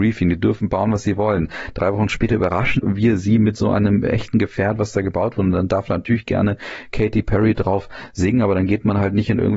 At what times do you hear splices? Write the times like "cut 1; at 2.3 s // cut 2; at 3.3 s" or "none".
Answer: none